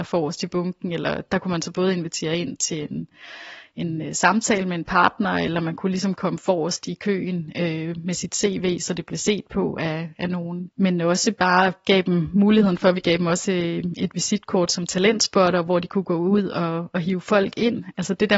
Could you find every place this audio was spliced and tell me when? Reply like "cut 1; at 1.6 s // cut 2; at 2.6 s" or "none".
cut 1; at 10.7 s